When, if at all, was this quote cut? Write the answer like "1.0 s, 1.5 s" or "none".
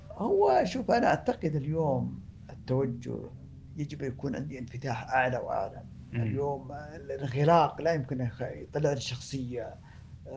none